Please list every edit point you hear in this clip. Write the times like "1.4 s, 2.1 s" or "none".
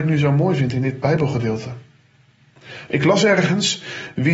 2.9 s